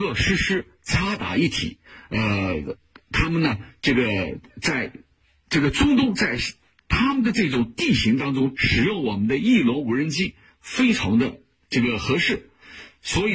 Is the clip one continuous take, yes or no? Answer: no